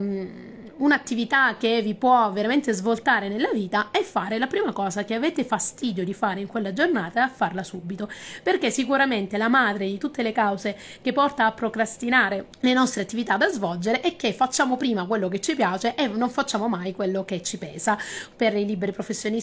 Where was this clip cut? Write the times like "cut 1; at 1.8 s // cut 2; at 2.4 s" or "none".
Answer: cut 1; at 12.5 s